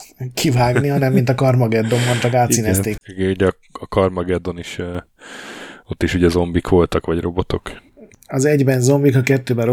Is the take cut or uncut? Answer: cut